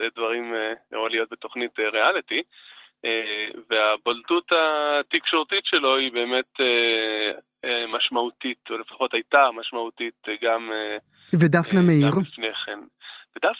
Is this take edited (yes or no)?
no